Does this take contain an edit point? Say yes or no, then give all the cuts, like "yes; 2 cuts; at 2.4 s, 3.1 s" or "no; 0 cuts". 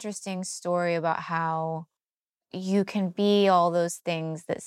no; 0 cuts